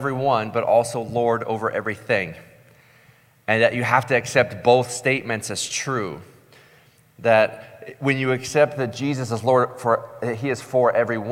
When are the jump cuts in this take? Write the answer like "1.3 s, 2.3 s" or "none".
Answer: none